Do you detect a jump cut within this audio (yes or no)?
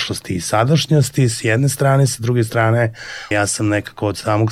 yes